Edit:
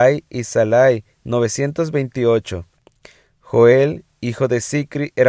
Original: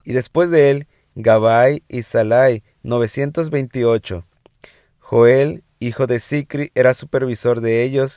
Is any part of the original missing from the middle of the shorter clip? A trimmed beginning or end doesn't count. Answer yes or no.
no